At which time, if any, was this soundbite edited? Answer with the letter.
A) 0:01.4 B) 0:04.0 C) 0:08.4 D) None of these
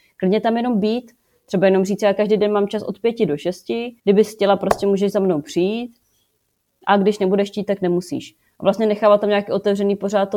B